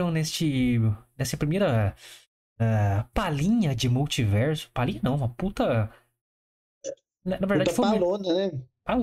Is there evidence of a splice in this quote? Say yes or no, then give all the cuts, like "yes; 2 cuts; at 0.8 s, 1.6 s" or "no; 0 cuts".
no; 0 cuts